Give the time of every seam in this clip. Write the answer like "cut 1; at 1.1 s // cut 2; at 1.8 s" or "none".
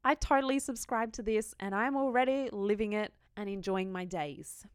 cut 1; at 3.3 s